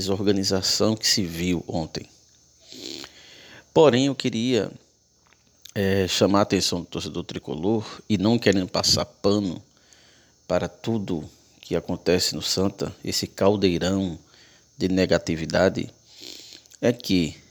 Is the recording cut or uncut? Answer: uncut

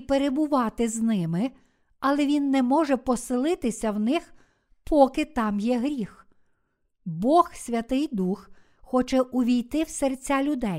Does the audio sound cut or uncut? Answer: uncut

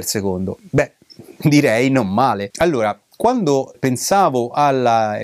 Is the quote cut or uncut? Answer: cut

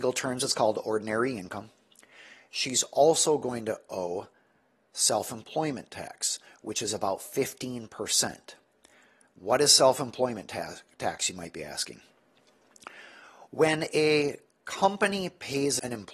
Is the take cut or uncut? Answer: uncut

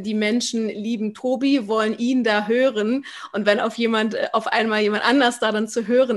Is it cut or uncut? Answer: uncut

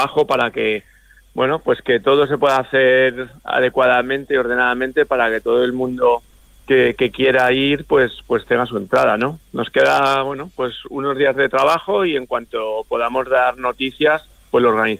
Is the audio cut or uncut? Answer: uncut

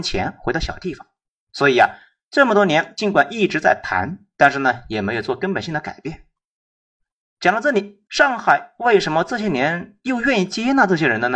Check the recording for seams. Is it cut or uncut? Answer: cut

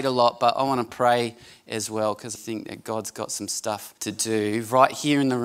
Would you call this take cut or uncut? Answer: cut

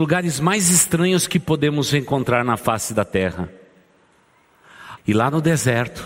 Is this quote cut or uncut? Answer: cut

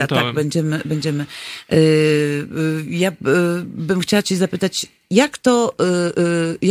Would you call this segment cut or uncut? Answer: uncut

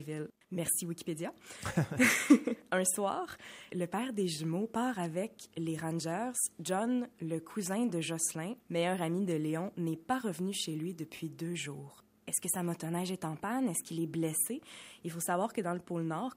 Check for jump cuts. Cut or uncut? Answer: cut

